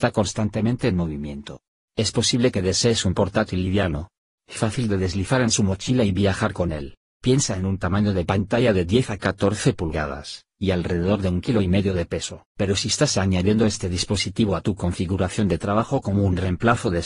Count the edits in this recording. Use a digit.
2